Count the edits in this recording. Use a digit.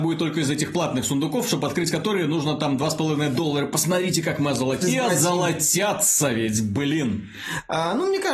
1